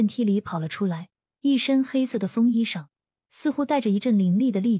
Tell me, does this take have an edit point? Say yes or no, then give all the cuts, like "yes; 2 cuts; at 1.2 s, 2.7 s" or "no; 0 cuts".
no; 0 cuts